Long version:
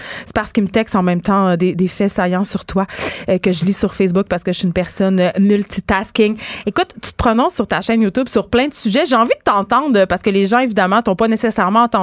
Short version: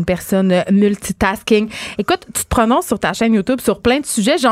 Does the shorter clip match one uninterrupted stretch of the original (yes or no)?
yes